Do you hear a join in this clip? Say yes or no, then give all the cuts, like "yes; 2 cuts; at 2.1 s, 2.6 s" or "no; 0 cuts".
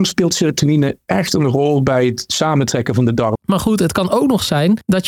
yes; 1 cut; at 3.4 s